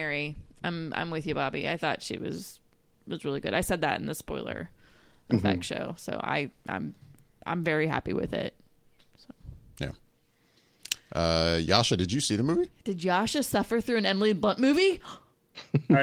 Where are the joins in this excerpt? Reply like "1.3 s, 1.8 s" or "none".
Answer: none

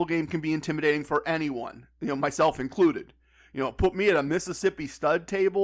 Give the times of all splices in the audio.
none

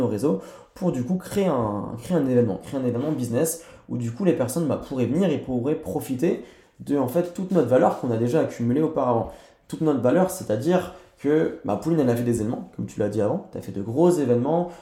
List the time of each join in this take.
none

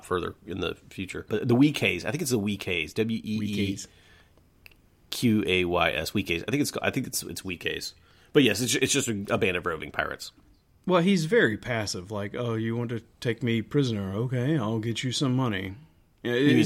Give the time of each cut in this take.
none

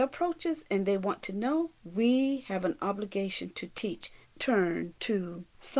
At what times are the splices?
1.8 s, 4.2 s

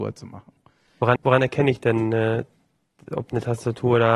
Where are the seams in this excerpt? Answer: 1.2 s

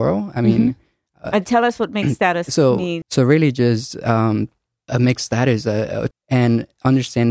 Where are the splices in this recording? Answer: 3.0 s, 4.9 s, 6.1 s

